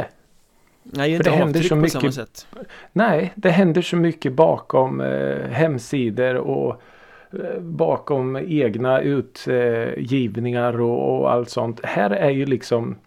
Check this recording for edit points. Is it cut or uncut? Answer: uncut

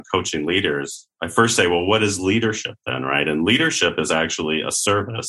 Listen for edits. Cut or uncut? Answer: uncut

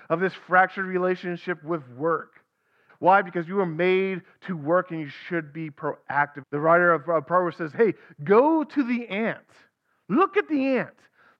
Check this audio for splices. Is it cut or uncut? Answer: cut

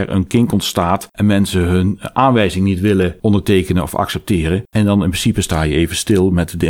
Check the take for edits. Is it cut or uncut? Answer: uncut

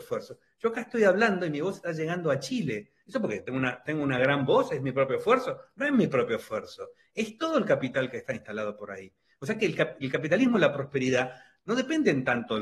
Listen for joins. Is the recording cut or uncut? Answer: uncut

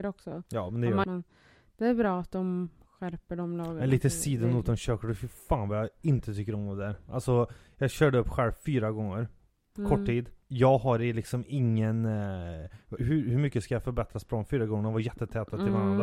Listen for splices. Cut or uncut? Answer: cut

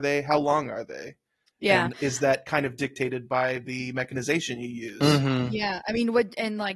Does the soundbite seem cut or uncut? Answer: uncut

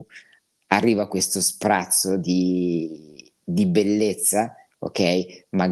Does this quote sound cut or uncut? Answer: uncut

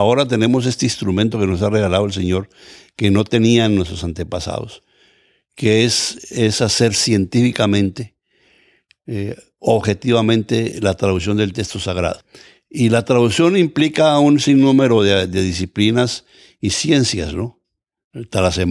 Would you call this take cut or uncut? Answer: uncut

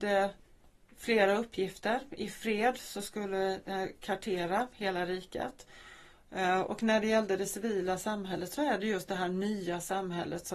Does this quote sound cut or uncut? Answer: cut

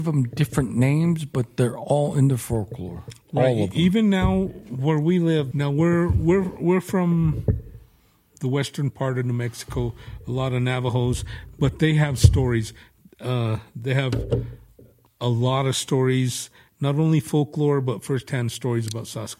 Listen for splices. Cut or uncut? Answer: cut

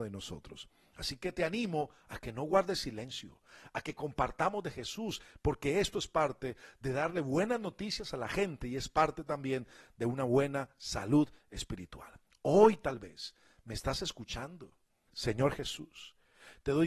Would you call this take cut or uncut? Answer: cut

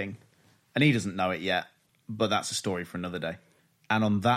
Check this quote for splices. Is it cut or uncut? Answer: cut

